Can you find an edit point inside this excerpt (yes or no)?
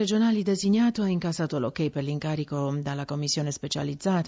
yes